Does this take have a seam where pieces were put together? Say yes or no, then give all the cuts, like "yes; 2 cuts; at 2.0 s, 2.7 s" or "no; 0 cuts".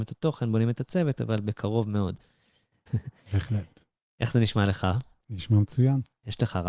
yes; 1 cut; at 2.9 s